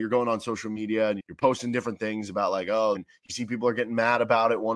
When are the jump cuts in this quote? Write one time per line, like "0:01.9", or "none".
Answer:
0:01.2
0:03.0